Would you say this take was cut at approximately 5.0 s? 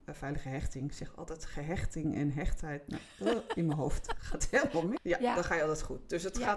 yes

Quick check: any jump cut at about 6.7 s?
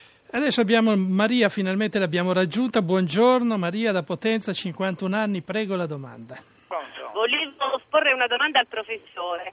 yes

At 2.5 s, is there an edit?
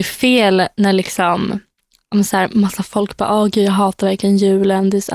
no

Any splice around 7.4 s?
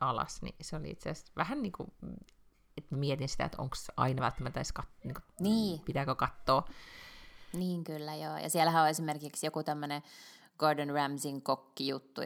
no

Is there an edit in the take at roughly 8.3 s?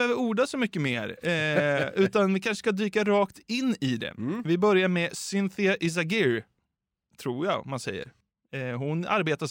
no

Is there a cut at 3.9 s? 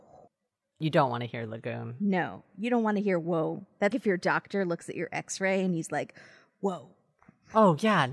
yes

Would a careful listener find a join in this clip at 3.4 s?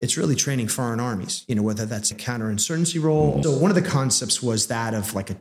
yes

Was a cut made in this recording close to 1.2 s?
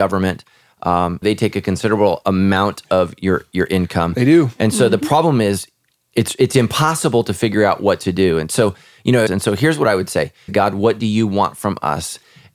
yes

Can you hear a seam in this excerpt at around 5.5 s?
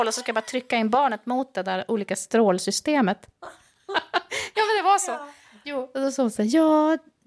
no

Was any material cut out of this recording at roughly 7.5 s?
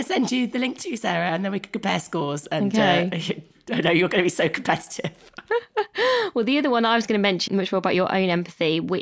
yes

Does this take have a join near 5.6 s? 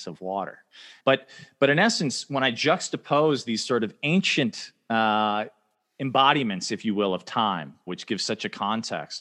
no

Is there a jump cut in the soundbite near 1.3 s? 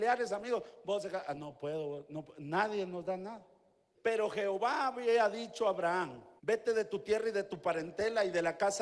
no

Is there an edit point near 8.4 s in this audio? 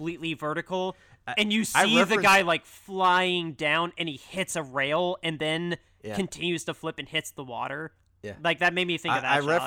no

